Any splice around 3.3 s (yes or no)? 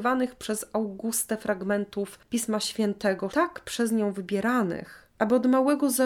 yes